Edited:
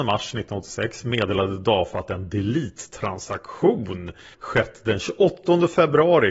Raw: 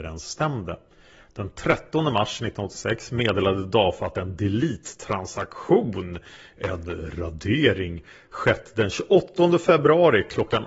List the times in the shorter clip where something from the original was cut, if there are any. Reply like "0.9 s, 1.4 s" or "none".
4.3 s